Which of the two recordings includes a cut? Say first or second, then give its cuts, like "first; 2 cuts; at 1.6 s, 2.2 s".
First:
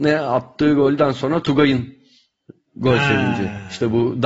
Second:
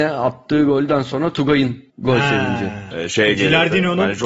second; 2 cuts; at 1.9 s, 2.9 s